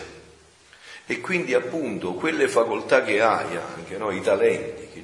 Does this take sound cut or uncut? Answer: uncut